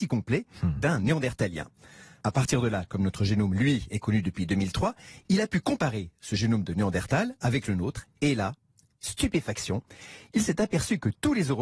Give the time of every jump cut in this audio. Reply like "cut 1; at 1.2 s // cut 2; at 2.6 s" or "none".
none